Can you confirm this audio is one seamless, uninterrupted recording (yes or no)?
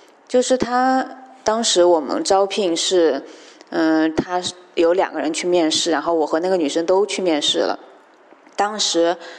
no